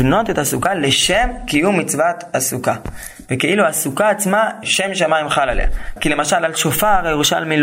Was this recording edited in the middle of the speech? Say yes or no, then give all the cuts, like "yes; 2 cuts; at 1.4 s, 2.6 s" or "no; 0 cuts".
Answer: yes; 2 cuts; at 4.6 s, 6.0 s